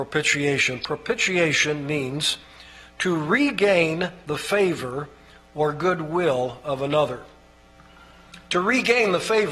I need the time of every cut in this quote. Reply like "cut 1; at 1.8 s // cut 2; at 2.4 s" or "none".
none